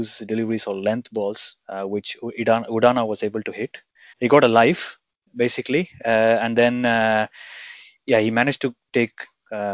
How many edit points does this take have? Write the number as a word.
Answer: one